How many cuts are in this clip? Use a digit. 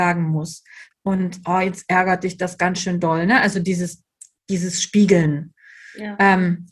1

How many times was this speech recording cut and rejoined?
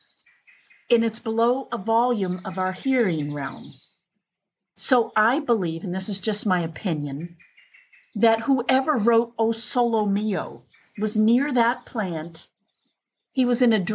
0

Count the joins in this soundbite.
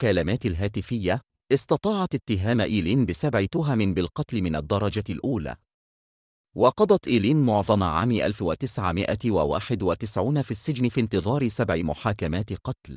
0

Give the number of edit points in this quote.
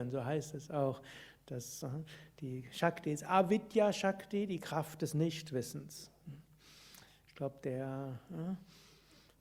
0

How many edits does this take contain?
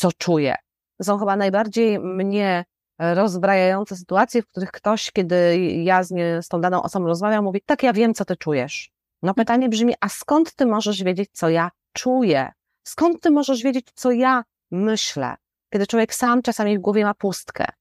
1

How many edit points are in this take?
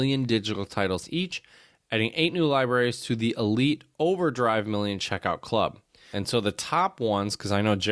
1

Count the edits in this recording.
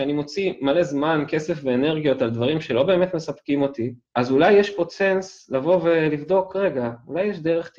1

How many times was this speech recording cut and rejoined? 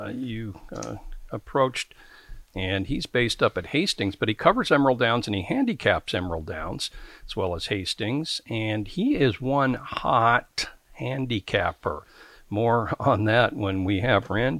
1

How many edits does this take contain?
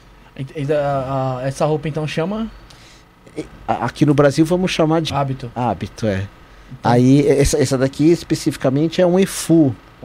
1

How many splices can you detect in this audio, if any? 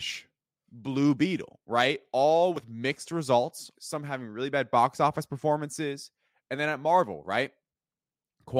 1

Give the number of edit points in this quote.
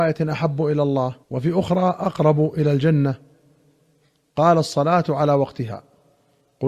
1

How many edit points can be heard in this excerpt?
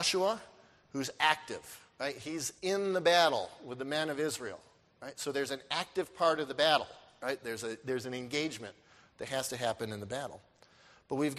0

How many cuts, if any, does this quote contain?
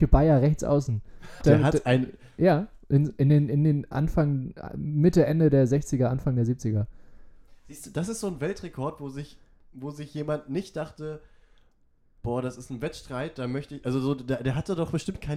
1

